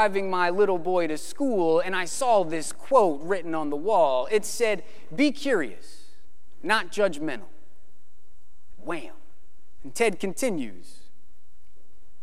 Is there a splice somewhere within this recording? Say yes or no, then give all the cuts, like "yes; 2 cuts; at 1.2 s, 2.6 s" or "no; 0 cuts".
yes; 2 cuts; at 8.7 s, 9.8 s